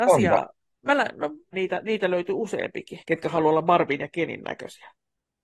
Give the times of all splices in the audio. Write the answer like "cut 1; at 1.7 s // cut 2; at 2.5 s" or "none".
cut 1; at 1.5 s // cut 2; at 3.0 s